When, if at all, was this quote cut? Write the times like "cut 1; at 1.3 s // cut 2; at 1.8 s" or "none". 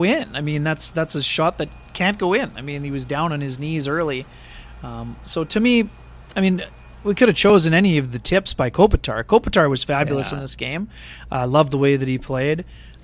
none